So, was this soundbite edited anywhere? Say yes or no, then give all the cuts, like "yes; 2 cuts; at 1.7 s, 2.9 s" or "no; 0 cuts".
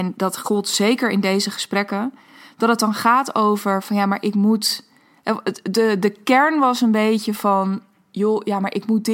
no; 0 cuts